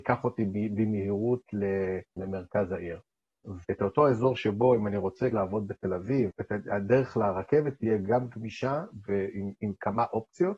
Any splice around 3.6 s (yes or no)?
yes